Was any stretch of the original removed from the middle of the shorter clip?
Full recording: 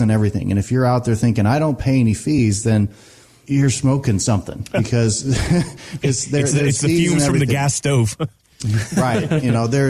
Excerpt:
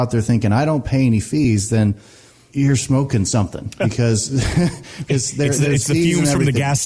no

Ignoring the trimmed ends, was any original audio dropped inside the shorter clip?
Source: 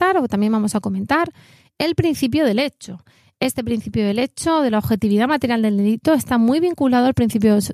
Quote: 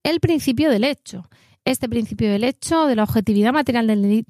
no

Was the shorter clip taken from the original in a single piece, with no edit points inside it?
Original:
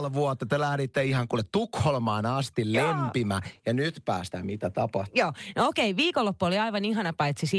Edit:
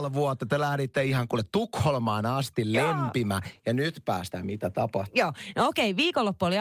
yes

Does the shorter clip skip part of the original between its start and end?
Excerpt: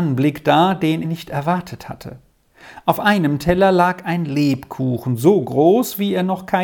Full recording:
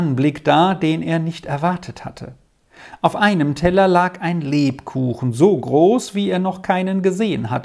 yes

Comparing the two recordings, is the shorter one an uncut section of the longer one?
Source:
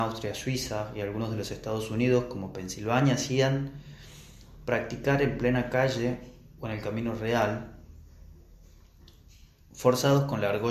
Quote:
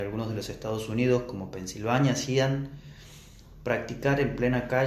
yes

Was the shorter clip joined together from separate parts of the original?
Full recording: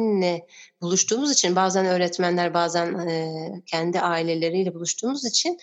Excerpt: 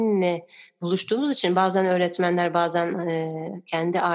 no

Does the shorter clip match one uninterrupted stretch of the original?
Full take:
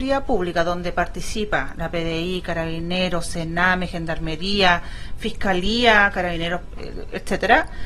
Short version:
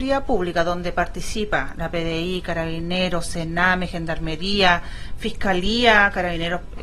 yes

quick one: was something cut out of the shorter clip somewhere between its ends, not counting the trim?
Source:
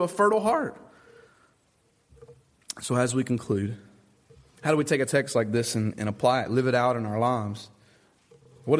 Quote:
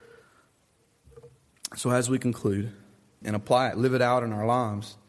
yes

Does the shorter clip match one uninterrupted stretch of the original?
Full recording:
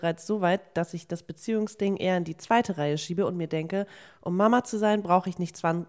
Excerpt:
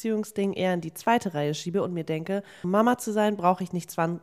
no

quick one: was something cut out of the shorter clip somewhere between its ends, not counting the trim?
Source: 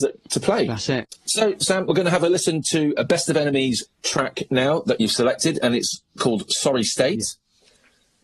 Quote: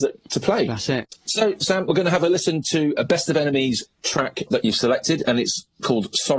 yes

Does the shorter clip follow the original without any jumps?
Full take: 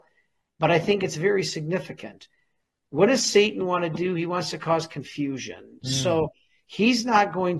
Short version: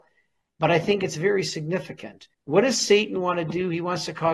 no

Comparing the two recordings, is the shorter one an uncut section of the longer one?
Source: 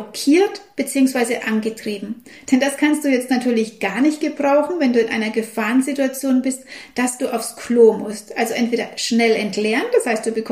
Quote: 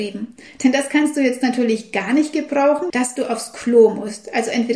no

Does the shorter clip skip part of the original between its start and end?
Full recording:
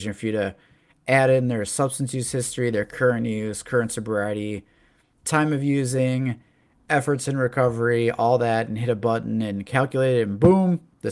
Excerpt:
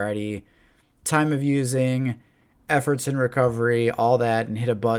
no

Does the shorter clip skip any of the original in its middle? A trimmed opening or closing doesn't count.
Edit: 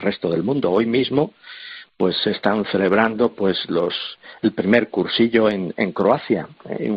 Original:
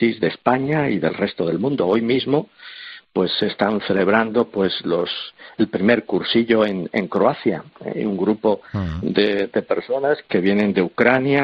no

